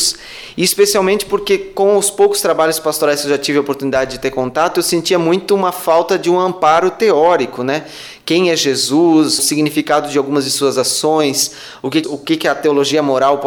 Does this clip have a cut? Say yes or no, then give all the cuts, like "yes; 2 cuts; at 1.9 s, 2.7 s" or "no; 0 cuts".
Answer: yes; 2 cuts; at 9.4 s, 12.0 s